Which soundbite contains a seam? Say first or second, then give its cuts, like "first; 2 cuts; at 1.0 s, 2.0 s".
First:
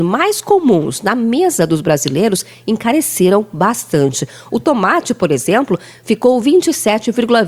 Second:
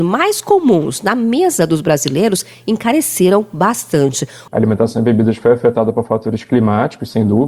second; 1 cut; at 4.5 s